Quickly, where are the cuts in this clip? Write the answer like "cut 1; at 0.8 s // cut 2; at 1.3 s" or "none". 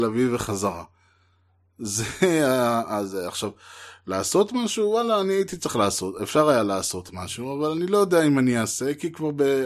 none